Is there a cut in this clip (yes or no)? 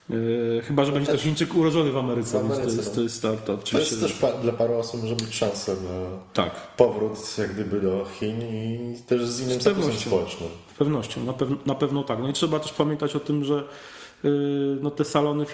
no